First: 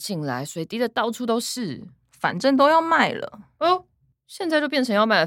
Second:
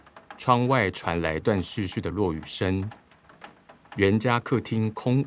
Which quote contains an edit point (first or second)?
second